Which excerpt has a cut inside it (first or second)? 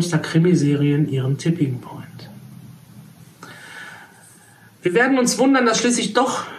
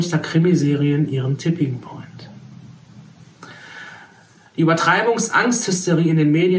second